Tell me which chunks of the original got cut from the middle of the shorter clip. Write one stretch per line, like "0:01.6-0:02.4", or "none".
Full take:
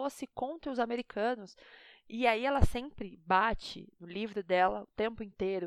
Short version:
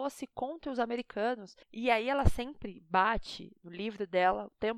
0:01.6-0:02.0